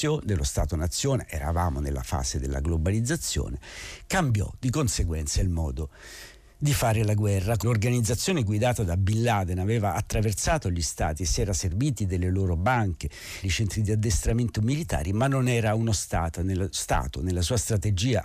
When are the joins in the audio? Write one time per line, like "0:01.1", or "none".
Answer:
0:07.6
0:13.4